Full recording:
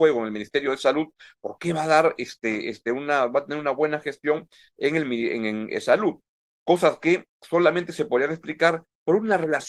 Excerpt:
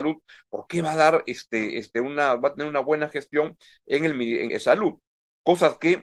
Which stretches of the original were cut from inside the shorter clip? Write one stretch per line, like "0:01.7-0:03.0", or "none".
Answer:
0:05.4-0:05.7